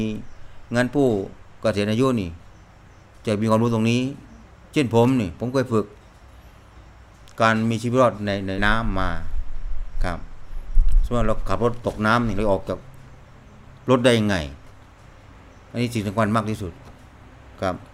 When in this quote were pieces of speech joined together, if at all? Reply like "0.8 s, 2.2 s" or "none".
8.6 s